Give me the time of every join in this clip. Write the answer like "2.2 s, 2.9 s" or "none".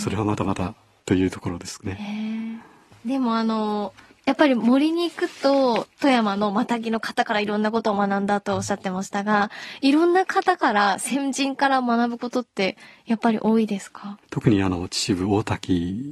14.2 s